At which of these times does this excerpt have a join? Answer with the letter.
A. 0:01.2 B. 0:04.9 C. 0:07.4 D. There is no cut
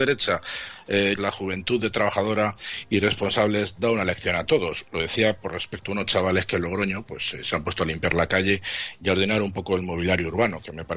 A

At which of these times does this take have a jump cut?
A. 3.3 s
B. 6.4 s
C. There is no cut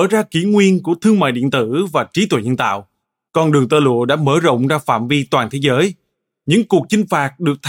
A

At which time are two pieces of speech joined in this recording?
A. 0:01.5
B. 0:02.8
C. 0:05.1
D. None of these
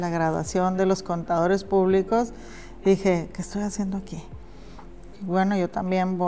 C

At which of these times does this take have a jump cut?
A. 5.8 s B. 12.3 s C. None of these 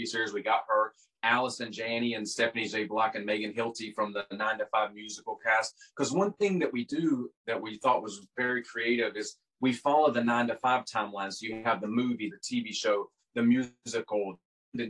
B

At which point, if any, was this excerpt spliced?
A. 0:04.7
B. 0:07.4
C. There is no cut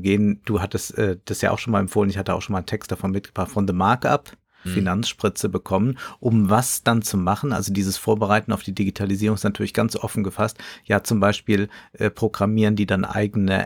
A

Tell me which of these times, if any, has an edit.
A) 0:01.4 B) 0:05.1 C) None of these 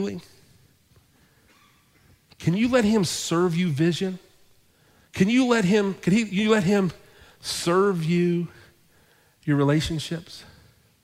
B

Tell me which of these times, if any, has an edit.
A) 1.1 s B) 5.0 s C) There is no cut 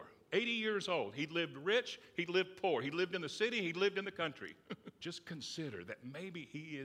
B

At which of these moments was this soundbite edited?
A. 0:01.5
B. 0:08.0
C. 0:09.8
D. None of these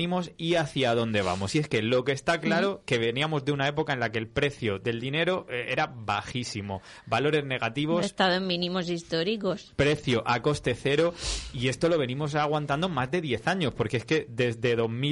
D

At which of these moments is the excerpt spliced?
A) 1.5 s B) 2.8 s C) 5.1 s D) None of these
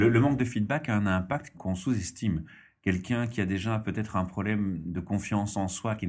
A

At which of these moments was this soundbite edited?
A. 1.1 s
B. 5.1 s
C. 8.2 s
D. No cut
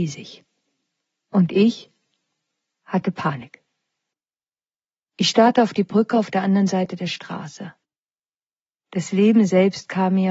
B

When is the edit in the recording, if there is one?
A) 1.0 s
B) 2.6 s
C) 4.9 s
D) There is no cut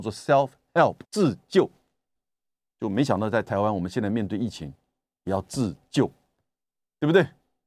A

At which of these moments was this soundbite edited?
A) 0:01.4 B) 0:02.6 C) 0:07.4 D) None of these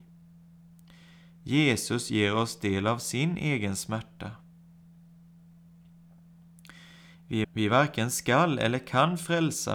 C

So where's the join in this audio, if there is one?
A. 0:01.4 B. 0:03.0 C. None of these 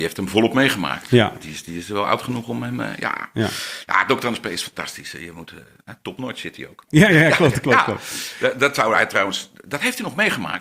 C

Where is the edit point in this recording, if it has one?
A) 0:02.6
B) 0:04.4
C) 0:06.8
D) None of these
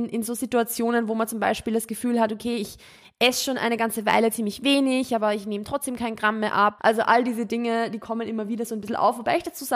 C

